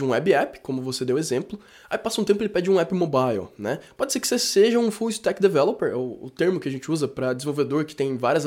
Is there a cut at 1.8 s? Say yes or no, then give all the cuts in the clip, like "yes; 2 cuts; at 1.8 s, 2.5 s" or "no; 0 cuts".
no; 0 cuts